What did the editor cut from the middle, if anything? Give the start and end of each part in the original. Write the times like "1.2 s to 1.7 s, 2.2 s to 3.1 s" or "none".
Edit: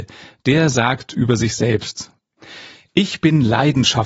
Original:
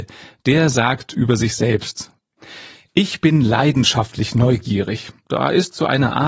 none